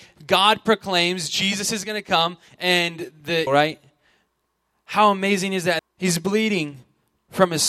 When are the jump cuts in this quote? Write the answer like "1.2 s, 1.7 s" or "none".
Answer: 3.5 s, 5.8 s